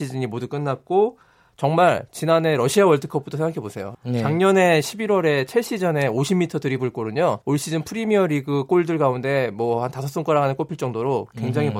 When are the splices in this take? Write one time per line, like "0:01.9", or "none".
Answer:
0:03.9
0:07.4